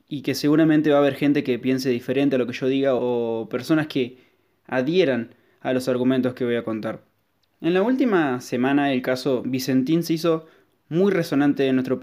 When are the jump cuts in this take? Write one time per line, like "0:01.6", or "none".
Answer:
0:07.4

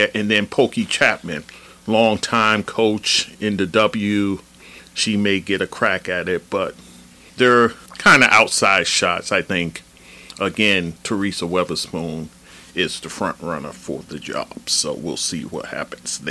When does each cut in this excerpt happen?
none

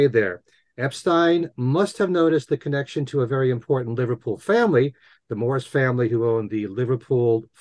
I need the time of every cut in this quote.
none

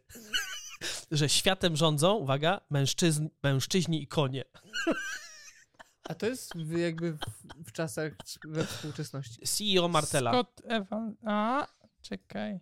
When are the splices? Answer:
0:09.4

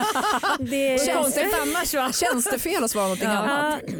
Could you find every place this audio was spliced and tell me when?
none

